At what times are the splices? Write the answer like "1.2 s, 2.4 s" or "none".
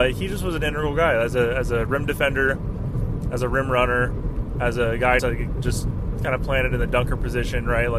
5.2 s